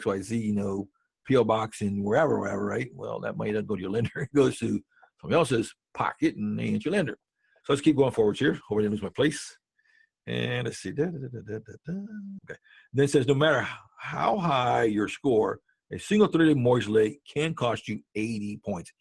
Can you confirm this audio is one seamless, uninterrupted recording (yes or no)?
no